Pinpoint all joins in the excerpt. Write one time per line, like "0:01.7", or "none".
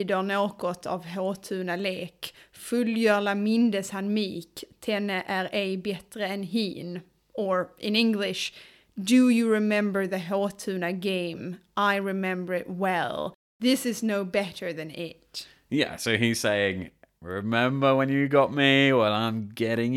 none